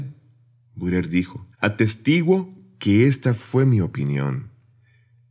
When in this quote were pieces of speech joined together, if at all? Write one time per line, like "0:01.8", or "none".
0:01.5